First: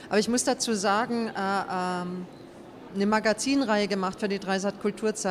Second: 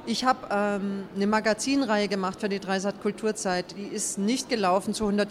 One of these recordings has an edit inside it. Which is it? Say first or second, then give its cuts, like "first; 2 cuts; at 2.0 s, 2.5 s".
first; 1 cut; at 2.9 s